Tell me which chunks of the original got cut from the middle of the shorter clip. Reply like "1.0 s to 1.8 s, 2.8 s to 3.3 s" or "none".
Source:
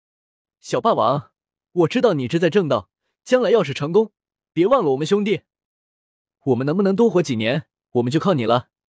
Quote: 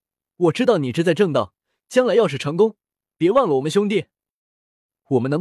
none